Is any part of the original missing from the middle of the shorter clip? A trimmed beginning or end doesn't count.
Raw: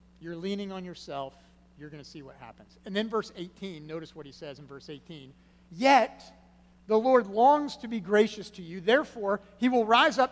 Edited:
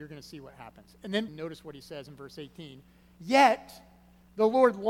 yes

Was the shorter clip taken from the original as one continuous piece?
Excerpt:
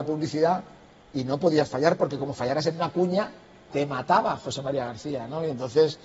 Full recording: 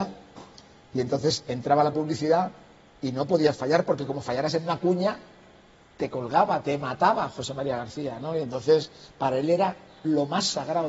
no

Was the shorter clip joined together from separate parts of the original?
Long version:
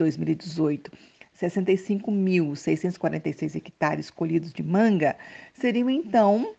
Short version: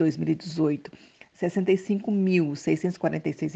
no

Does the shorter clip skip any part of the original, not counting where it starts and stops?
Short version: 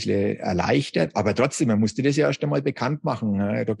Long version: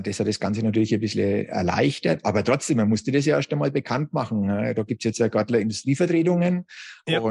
no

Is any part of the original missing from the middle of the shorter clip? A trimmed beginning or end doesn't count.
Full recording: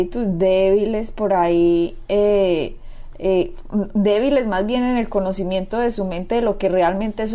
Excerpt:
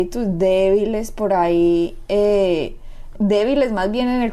yes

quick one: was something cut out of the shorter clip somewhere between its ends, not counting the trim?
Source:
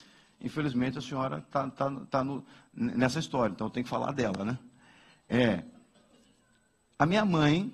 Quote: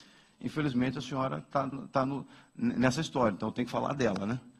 yes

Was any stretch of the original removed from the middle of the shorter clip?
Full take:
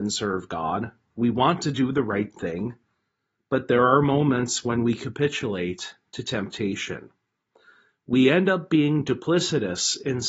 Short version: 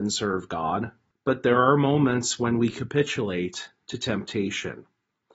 yes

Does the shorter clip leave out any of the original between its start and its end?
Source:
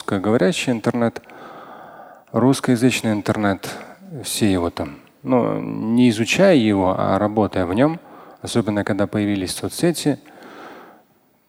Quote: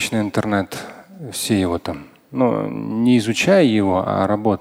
no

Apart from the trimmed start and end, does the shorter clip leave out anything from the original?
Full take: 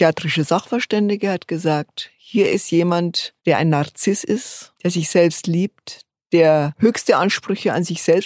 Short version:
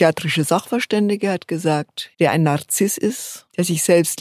yes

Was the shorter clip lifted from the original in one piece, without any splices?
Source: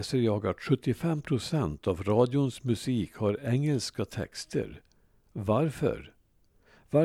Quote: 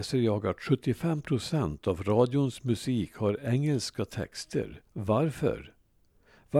no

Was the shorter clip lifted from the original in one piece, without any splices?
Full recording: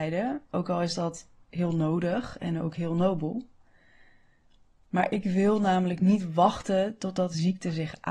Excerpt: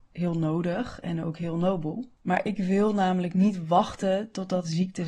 no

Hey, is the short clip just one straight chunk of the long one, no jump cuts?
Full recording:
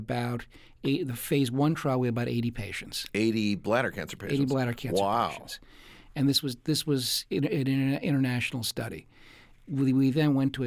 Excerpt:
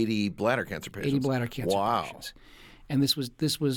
yes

